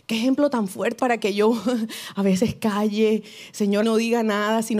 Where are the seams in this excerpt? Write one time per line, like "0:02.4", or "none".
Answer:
0:01.0
0:03.8